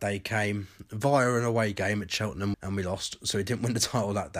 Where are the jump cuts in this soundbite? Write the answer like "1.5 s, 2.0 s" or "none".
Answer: 2.5 s